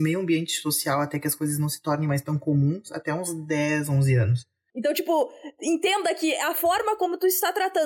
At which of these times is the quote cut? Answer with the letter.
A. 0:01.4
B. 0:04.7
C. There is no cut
B